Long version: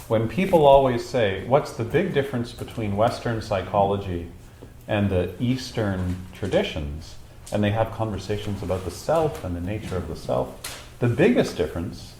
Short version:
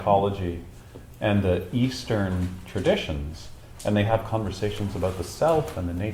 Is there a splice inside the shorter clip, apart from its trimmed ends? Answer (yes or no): no